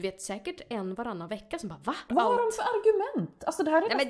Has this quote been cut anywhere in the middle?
yes; 1 cut; at 2.1 s

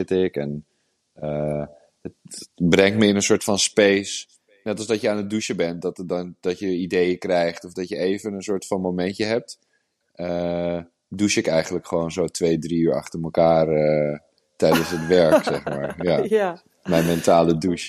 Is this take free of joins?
yes; 0 cuts

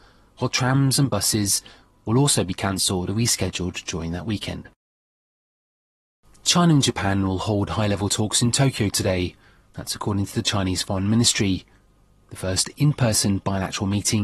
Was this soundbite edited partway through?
no; 0 cuts

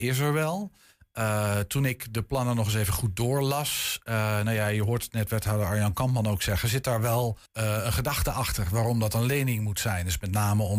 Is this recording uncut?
no; 1 cut; at 7.5 s

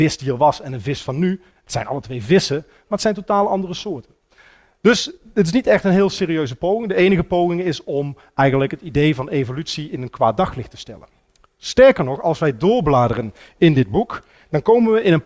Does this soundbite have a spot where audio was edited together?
no; 0 cuts

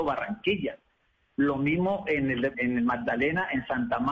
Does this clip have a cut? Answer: yes; 1 cut; at 2.5 s

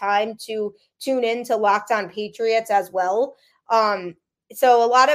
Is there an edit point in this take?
no; 0 cuts

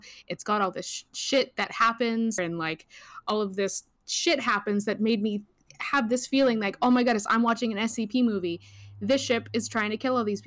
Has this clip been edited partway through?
yes; 1 cut; at 2.4 s

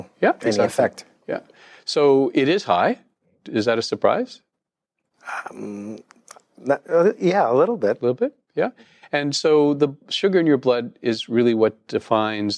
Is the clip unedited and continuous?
yes; 0 cuts

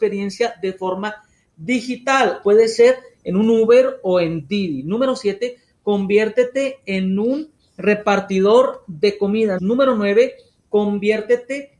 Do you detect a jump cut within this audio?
yes; 2 cuts; at 2.4 s, 9.6 s

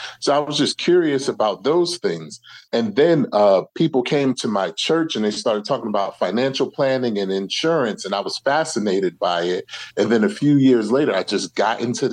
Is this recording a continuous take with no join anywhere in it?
yes; 0 cuts

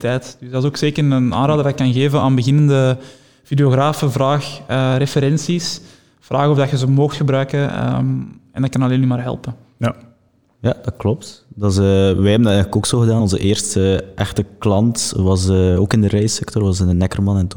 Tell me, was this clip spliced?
no; 0 cuts

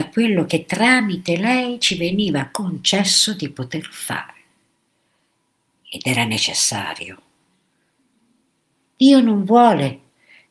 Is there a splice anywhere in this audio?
no; 0 cuts

